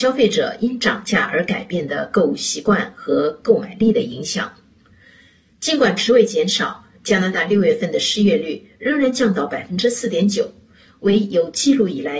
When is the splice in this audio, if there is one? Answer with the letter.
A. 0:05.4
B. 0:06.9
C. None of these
C